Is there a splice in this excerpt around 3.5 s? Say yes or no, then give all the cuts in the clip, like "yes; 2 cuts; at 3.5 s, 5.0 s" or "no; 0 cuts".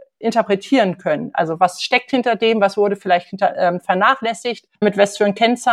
no; 1 cut; at 4.7 s